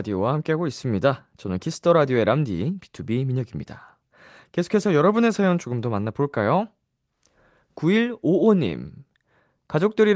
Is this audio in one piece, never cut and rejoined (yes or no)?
yes